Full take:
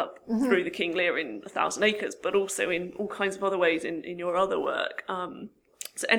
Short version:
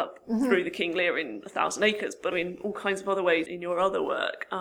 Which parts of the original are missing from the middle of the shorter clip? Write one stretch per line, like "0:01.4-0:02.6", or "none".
0:02.3-0:02.7
0:03.8-0:04.0